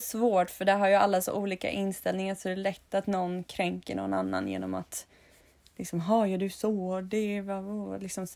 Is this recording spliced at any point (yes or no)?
no